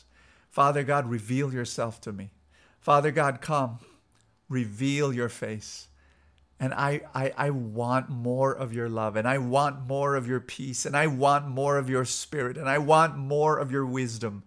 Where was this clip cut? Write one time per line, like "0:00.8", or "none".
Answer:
none

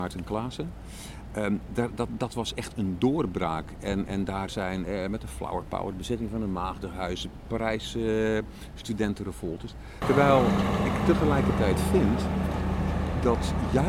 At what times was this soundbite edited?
0:10.0

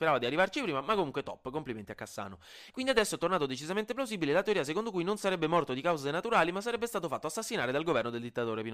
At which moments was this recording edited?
0:02.7

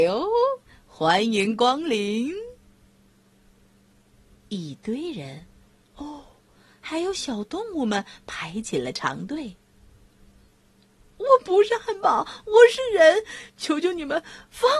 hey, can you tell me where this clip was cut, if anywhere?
none

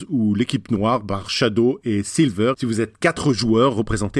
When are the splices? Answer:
0:02.5

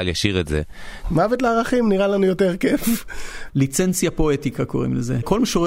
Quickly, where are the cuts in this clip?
0:01.0
0:03.5

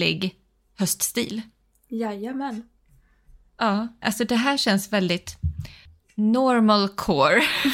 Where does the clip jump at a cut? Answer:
0:04.0

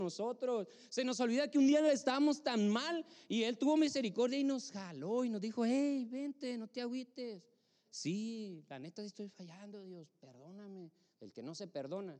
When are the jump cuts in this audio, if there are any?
0:07.8
0:11.1

